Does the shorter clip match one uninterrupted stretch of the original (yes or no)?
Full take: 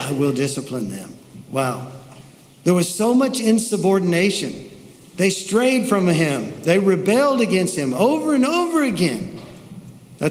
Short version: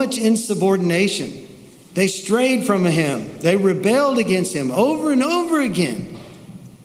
yes